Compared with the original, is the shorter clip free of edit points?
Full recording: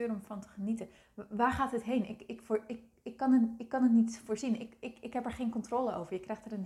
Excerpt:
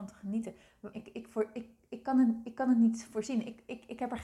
no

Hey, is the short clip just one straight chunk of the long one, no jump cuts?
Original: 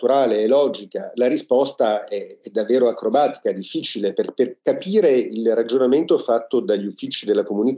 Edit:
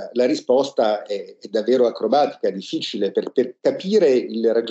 yes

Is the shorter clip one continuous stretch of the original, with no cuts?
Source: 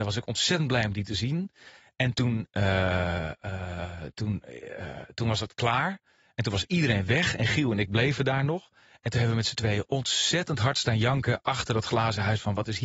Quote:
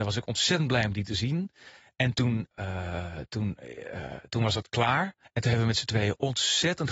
no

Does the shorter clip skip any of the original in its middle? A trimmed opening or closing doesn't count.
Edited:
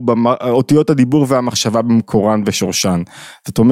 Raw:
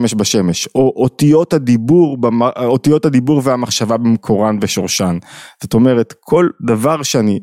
no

